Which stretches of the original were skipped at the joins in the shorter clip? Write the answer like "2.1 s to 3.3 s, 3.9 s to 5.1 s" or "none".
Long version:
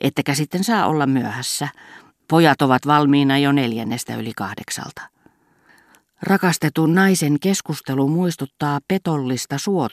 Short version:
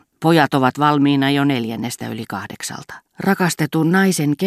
5.1 s to 6.1 s